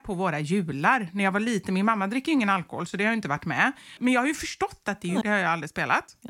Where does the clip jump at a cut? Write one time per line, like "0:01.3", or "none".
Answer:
0:04.0
0:05.2